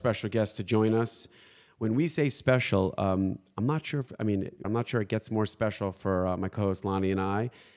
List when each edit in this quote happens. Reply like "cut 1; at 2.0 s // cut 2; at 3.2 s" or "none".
cut 1; at 4.6 s